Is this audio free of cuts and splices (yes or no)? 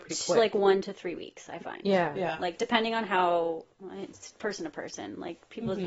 yes